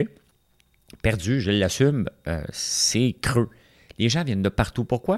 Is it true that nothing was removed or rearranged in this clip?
yes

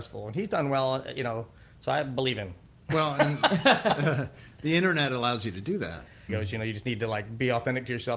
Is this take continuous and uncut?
no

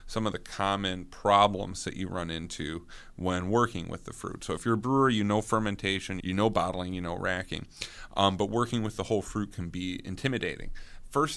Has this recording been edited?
yes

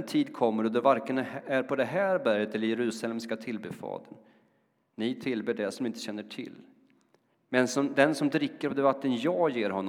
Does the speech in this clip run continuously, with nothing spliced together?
no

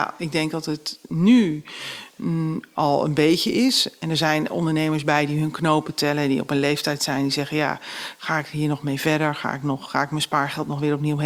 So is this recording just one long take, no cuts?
yes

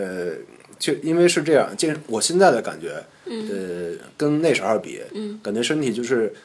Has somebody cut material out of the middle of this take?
no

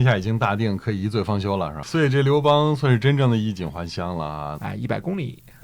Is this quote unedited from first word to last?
no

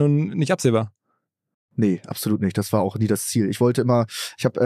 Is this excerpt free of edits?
yes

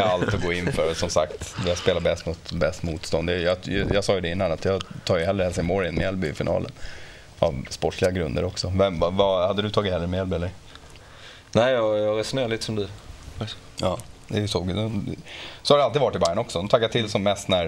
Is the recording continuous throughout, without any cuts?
yes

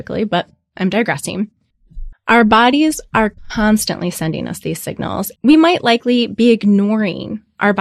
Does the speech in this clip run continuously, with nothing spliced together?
no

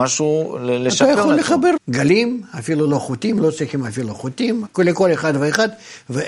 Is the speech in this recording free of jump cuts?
no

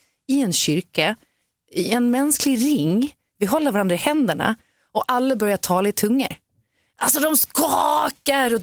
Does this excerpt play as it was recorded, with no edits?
yes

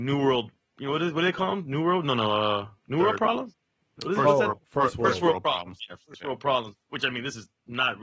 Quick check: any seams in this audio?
no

